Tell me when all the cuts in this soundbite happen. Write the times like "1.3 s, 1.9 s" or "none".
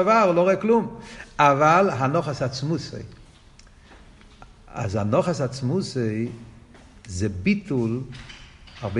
none